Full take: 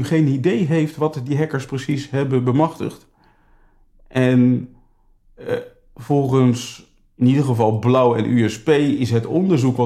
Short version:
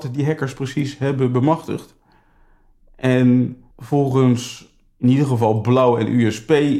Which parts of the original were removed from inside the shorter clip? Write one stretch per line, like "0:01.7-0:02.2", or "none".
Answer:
0:04.8-0:05.9